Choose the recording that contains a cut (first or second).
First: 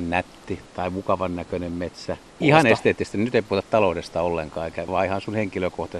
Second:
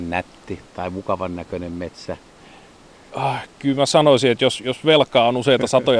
first